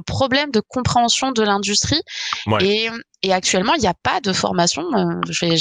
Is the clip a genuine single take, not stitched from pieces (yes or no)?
yes